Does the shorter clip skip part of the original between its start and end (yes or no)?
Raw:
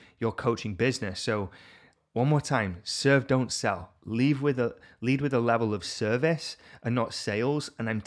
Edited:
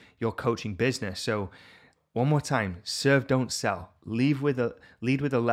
no